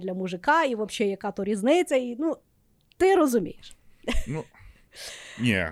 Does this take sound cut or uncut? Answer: uncut